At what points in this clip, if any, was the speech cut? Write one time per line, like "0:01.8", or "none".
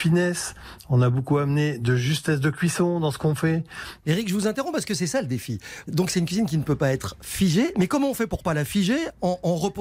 0:04.0
0:05.8